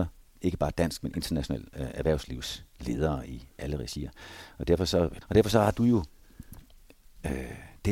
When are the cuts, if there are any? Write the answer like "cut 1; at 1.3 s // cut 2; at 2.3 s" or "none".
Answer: cut 1; at 5.2 s